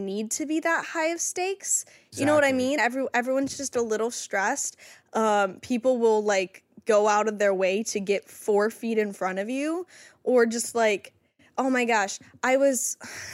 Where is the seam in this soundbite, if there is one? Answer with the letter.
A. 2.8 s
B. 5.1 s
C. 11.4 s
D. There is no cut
D